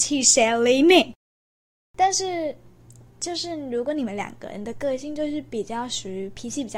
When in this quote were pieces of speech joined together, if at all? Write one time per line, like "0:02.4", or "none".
none